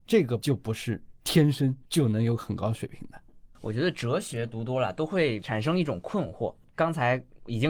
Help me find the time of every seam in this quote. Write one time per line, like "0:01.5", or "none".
none